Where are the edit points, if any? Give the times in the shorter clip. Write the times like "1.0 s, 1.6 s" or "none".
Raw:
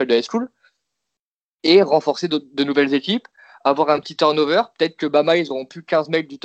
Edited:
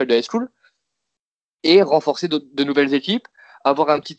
none